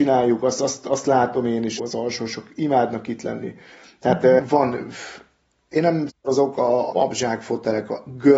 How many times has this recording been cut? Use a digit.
3